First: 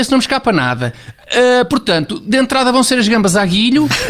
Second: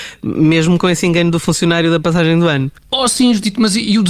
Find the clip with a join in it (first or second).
second